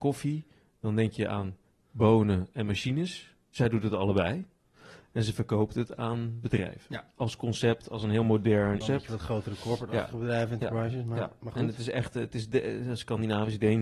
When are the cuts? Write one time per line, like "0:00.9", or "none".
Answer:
0:08.8